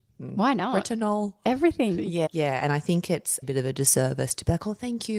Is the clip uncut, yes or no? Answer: no